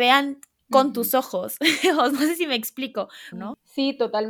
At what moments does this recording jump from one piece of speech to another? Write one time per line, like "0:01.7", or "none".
0:03.3